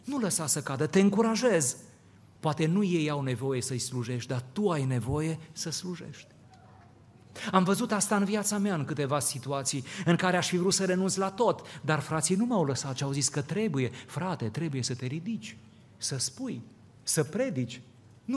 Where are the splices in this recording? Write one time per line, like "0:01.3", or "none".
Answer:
0:02.4